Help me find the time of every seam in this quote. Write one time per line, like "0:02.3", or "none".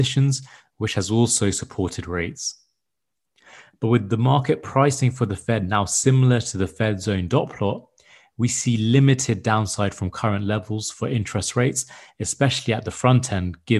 none